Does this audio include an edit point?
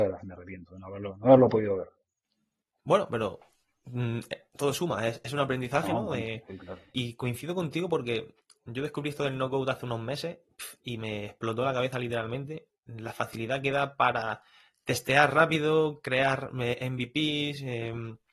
no; 0 cuts

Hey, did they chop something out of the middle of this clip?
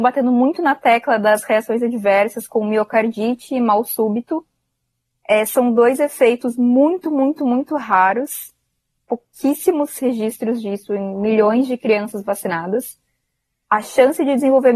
no; 0 cuts

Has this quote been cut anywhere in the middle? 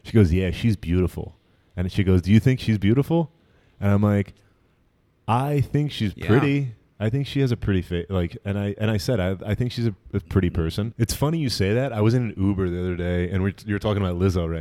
yes; 1 cut; at 10.9 s

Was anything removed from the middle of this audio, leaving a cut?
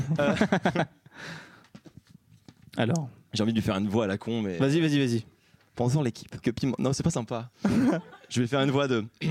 yes; 1 cut; at 6.4 s

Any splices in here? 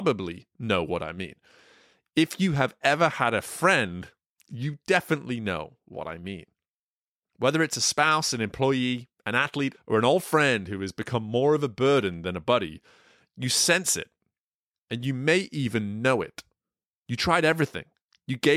yes; 1 cut; at 9.7 s

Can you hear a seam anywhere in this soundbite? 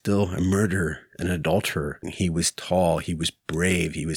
yes; 1 cut; at 2.0 s

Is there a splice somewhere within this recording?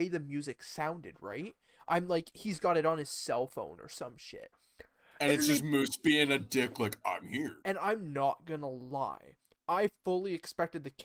yes; 1 cut; at 7.6 s

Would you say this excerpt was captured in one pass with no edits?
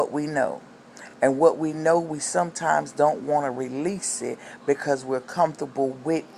yes; 0 cuts

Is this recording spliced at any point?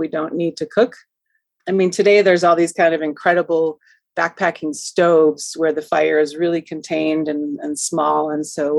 no; 0 cuts

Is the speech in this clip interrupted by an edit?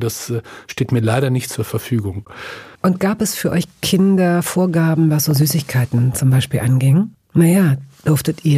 yes; 2 cuts; at 2.7 s, 7.2 s

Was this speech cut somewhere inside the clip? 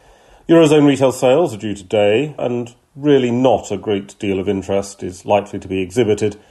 yes; 1 cut; at 2.4 s

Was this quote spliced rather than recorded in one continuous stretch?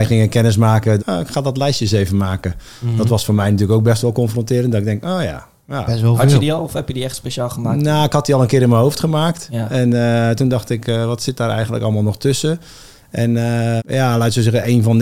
yes; 2 cuts; at 1.0 s, 13.8 s

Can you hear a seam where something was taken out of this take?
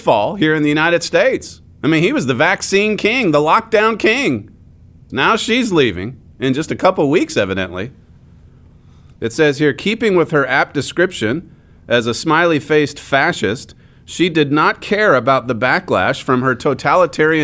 yes; 1 cut; at 5.1 s

